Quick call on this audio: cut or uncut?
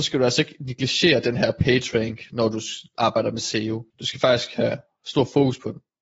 cut